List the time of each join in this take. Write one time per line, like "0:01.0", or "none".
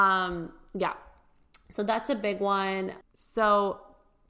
0:03.0